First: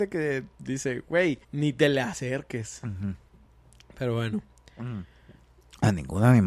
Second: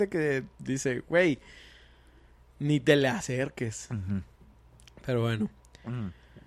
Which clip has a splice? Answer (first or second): first